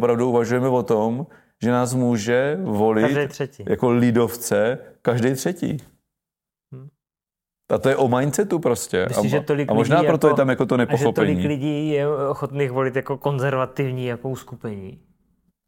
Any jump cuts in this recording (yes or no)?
no